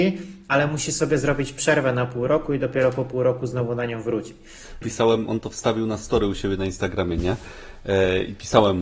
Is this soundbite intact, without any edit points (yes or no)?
no